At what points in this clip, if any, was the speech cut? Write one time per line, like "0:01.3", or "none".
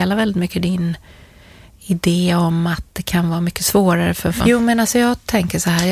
0:04.4